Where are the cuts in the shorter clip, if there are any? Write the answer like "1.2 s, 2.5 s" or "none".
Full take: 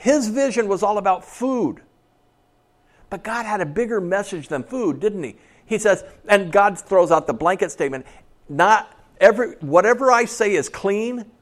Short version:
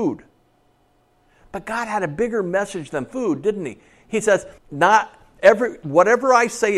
4.6 s